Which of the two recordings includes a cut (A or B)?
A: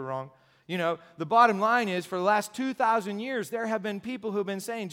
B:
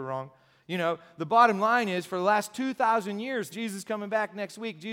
B